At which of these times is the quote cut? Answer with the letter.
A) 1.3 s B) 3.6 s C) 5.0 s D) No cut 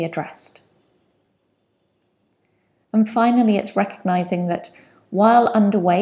D